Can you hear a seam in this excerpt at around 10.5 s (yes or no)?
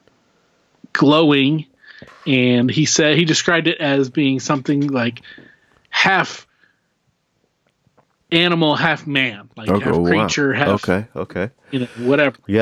no